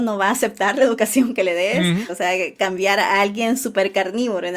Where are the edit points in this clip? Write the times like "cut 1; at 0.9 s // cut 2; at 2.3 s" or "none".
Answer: cut 1; at 2.1 s